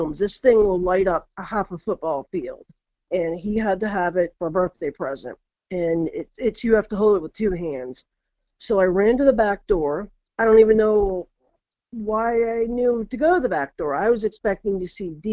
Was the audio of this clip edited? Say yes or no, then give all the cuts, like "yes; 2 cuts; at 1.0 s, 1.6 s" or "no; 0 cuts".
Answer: no; 0 cuts